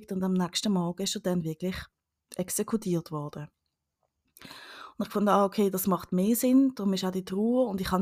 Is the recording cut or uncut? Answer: uncut